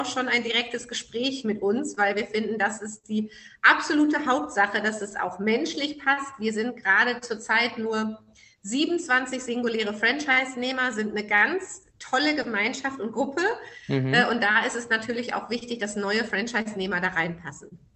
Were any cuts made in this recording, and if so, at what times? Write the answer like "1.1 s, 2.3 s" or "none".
none